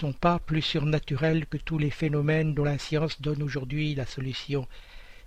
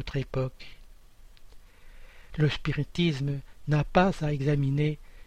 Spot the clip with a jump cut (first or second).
second